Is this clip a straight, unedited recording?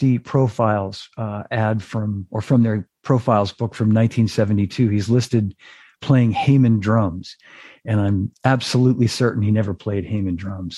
yes; 0 cuts

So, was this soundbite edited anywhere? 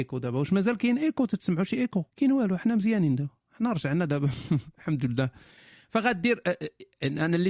yes; 1 cut; at 2.1 s

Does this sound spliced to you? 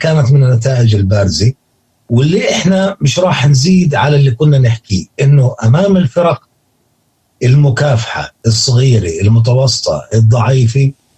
no; 0 cuts

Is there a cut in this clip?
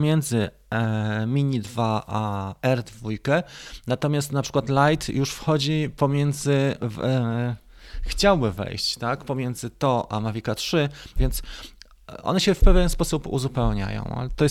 yes; 1 cut; at 11.2 s

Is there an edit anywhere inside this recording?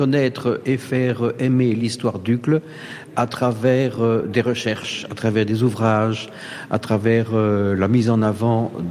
no; 0 cuts

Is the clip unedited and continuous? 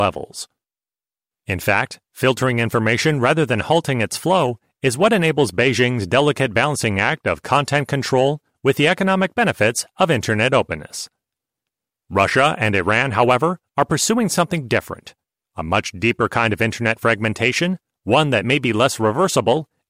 yes; 0 cuts

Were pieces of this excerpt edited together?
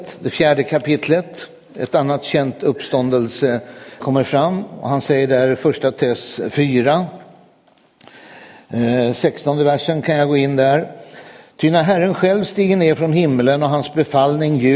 yes; 1 cut; at 4.0 s

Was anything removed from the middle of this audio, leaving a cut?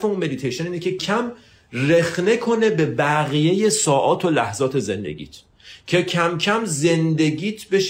yes; 1 cut; at 1.0 s

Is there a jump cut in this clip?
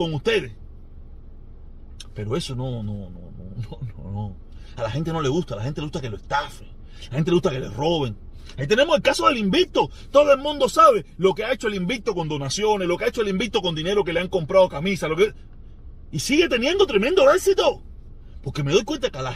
no; 0 cuts

